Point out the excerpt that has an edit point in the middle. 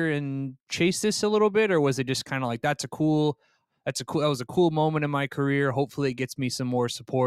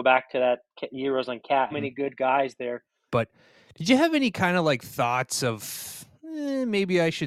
second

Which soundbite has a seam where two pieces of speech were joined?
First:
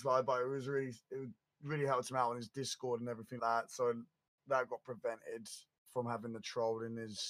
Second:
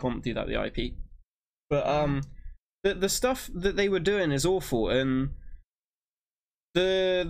first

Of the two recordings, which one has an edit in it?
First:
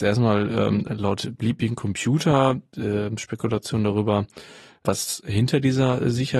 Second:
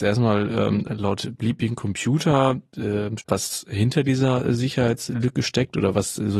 second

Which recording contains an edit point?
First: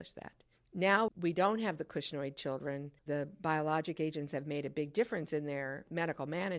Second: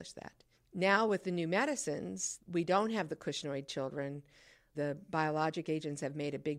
first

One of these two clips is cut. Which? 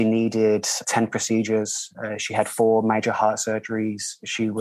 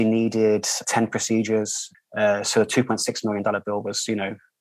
second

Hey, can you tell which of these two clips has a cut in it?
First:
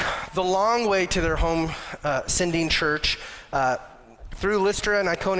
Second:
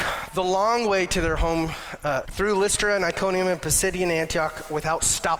second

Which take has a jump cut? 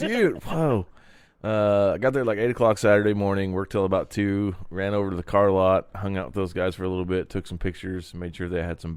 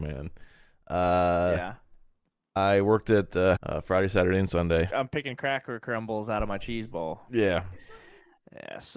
second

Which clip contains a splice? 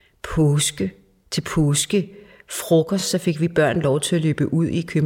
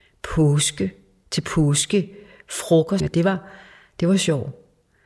second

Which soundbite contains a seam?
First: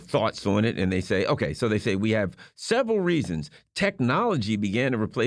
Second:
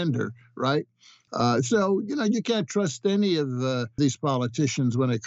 second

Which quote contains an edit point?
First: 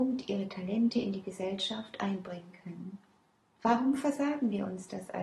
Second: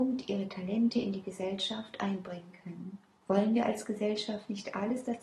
second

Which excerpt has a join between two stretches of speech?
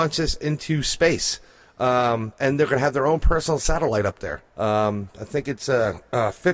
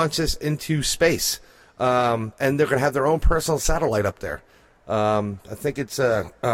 first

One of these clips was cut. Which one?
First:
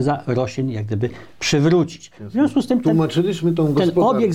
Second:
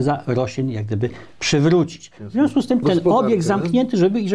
second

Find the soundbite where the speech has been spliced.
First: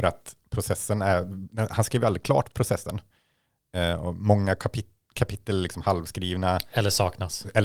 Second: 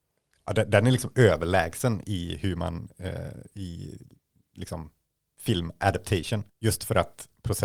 second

